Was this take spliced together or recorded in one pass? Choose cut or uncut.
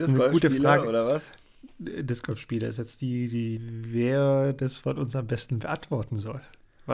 cut